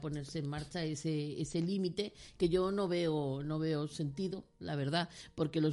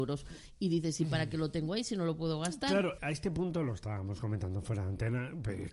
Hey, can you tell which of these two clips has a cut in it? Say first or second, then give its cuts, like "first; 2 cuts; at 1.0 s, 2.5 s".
second; 1 cut; at 3.0 s